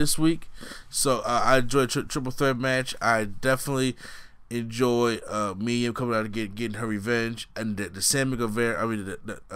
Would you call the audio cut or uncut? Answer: uncut